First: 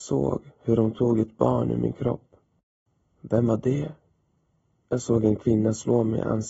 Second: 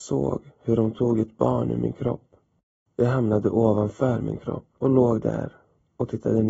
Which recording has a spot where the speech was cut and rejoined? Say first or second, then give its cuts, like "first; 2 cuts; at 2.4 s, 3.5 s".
second; 2 cuts; at 2.9 s, 4.8 s